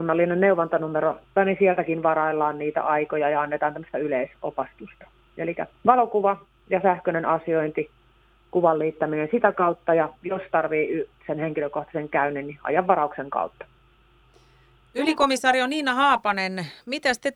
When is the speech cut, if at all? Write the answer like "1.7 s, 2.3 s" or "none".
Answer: 1.4 s